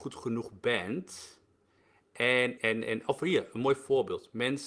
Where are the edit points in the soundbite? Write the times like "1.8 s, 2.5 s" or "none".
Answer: 2.6 s